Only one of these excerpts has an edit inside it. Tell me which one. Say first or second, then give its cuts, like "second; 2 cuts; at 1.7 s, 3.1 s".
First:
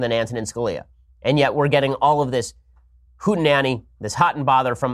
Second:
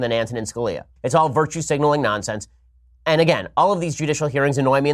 second; 1 cut; at 1.0 s